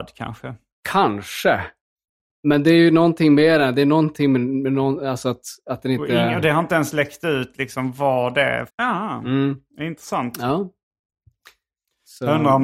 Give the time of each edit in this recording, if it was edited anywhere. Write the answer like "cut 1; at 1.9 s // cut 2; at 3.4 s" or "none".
cut 1; at 8.7 s